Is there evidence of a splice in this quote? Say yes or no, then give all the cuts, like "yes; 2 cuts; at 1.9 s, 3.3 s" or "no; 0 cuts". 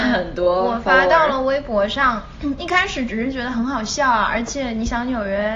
no; 0 cuts